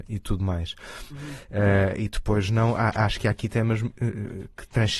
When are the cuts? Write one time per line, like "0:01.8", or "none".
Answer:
0:01.1